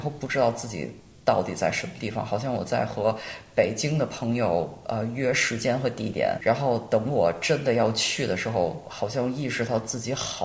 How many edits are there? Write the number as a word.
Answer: zero